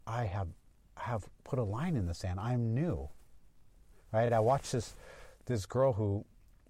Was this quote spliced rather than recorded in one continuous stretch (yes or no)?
no